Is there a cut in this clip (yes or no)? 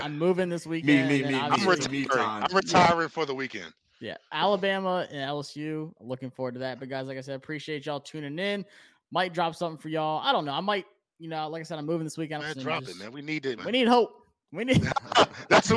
yes